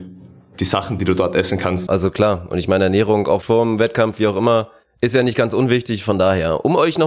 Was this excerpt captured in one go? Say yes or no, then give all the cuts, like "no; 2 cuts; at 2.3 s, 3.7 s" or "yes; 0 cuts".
no; 1 cut; at 1.9 s